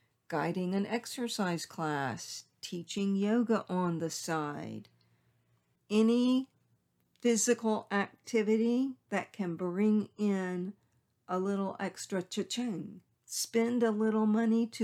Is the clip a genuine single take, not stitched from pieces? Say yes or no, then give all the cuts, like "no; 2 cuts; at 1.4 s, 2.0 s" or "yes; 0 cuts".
no; 2 cuts; at 5.8 s, 13.2 s